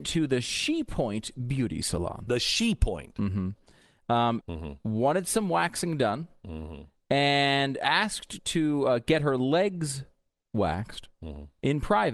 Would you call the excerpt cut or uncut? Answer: cut